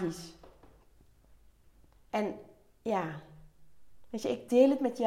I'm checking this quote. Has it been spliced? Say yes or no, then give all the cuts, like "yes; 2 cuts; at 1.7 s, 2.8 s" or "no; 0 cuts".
yes; 1 cut; at 2.1 s